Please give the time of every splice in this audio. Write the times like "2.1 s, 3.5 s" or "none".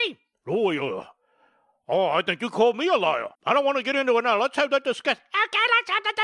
3.4 s